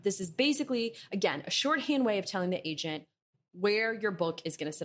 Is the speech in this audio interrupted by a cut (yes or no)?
no